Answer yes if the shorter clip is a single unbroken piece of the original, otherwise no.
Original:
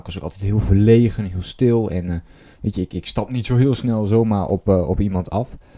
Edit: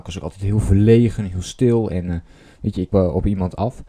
no